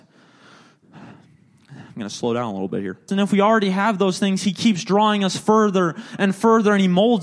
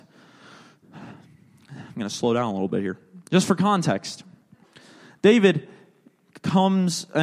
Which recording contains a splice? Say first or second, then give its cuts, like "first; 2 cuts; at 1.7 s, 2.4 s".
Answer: first; 1 cut; at 3.1 s